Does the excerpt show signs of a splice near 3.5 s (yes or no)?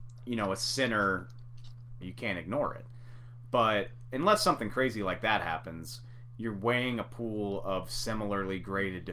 no